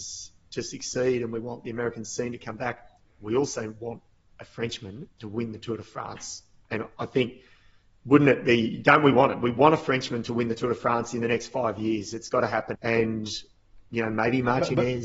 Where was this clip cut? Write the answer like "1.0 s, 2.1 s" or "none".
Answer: 12.7 s